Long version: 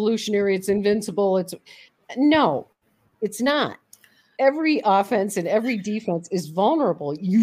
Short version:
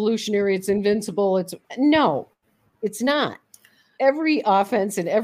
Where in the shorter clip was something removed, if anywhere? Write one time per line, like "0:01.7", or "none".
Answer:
0:01.6